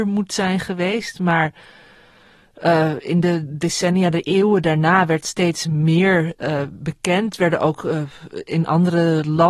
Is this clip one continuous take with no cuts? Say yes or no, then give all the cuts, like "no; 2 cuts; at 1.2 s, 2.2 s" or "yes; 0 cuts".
yes; 0 cuts